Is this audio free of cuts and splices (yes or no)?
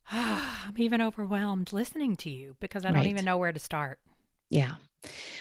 no